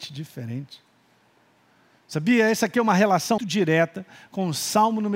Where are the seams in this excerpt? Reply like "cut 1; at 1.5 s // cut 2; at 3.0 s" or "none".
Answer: cut 1; at 3.4 s